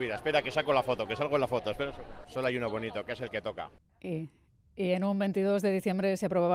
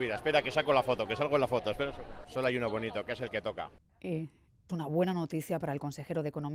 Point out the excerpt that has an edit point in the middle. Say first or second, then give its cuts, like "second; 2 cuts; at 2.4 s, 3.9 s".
second; 1 cut; at 4.7 s